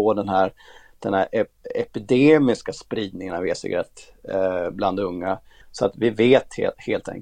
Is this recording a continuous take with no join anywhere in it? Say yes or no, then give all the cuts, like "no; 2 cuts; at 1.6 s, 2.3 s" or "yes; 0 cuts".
no; 1 cut; at 5.6 s